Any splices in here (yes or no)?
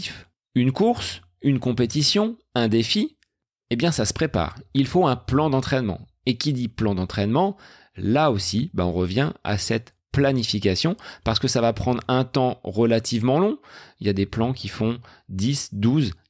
no